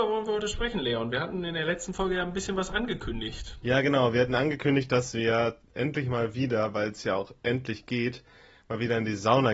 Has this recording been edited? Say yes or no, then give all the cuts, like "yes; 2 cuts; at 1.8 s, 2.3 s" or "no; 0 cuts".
no; 0 cuts